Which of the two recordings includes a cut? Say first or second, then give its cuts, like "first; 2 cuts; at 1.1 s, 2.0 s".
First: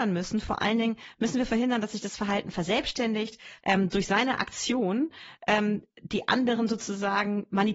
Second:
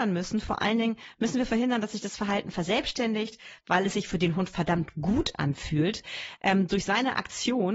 first; 1 cut; at 3.6 s